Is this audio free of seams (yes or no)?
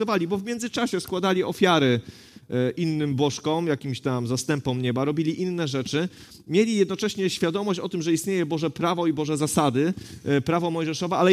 yes